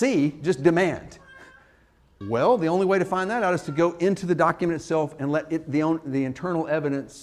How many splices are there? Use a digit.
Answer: 1